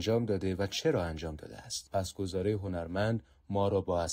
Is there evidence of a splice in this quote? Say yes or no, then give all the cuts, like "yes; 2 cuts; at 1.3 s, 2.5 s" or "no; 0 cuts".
no; 0 cuts